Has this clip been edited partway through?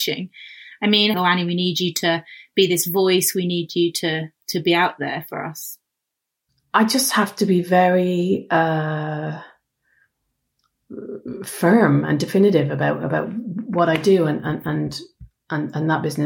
yes; 1 cut; at 1.1 s

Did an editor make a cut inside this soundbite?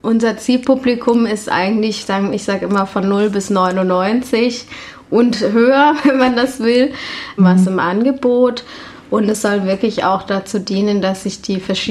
yes; 1 cut; at 7.4 s

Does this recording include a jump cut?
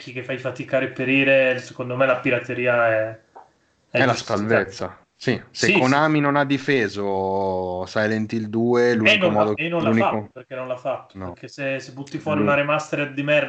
yes; 1 cut; at 9.6 s

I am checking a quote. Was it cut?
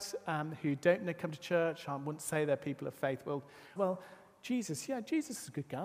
yes; 1 cut; at 3.8 s

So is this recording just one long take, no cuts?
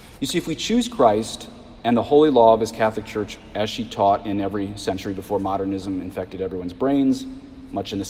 yes; 0 cuts

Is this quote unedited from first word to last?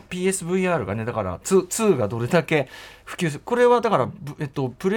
yes; 0 cuts

